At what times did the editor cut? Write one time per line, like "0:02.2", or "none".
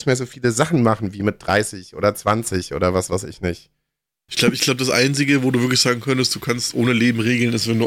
0:04.3